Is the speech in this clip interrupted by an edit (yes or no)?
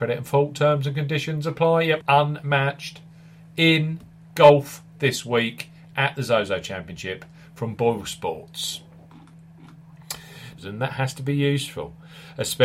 yes